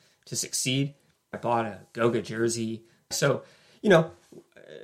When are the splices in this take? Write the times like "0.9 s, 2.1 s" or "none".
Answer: 1.3 s, 3.1 s